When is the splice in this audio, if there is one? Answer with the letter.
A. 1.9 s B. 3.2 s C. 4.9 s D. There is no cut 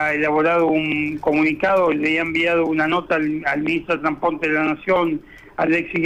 D